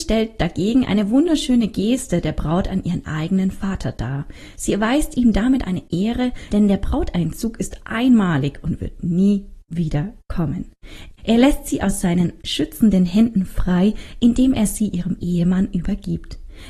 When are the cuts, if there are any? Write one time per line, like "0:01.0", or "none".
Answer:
0:06.5
0:11.2